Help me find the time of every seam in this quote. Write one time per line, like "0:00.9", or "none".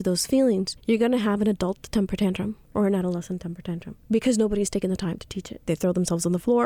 0:05.7